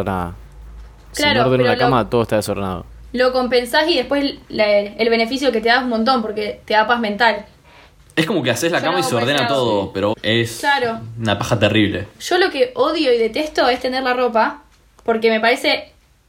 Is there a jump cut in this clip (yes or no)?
yes